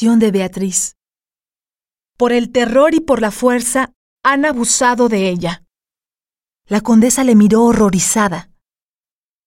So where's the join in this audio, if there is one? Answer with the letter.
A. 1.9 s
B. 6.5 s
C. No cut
B